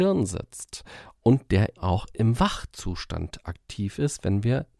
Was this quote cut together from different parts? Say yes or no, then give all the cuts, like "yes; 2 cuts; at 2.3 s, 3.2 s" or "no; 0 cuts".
yes; 1 cut; at 1.8 s